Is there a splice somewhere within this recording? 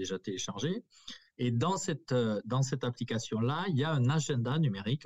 no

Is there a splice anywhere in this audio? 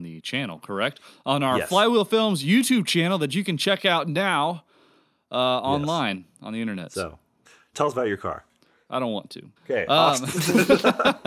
yes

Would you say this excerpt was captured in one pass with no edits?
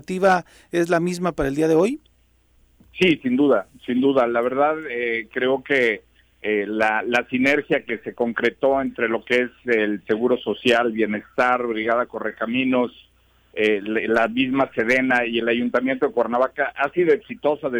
yes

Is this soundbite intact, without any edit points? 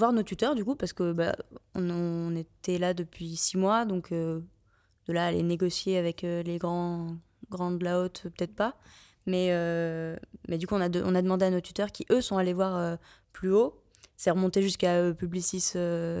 yes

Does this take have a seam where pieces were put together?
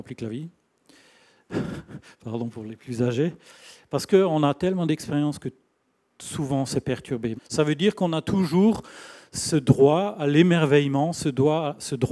yes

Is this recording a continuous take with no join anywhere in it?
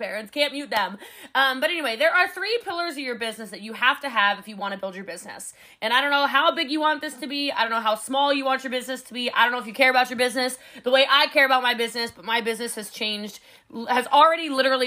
yes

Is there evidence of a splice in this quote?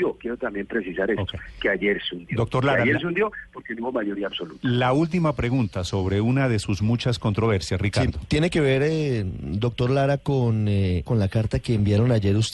yes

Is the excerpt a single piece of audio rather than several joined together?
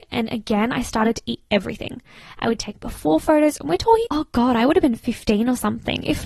no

